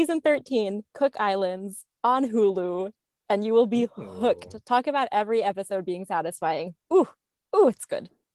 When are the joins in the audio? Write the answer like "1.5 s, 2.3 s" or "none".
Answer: none